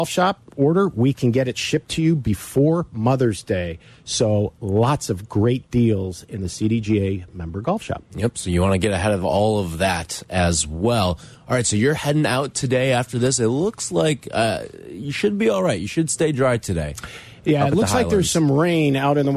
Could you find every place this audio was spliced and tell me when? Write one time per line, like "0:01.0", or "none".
none